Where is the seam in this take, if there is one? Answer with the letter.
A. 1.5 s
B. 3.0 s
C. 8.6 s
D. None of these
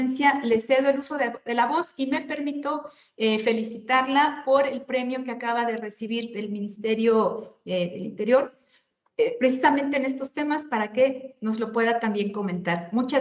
D